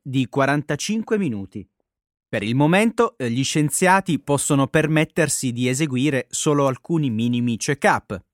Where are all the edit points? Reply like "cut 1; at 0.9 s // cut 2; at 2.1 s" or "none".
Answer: cut 1; at 2.1 s